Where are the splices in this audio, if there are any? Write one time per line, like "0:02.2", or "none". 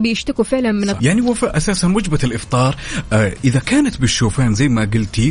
0:01.0